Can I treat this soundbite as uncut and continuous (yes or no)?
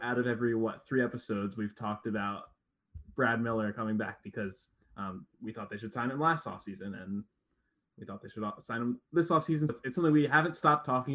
no